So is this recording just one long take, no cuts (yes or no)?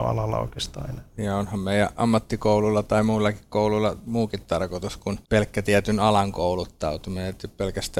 no